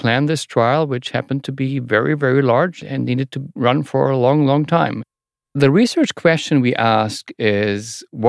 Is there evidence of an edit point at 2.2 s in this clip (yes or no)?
no